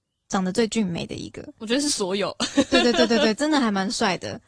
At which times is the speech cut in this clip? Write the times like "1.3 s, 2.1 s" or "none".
none

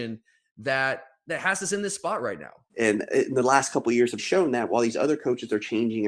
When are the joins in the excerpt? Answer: 2.7 s, 4.2 s

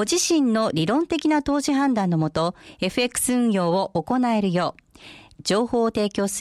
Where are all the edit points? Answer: 5.4 s

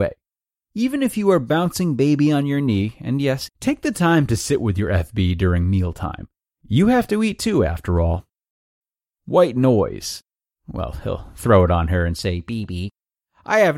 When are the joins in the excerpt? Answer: 3.5 s, 10.5 s

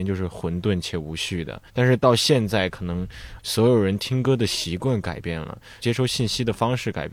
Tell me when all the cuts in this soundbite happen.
1.7 s, 5.8 s

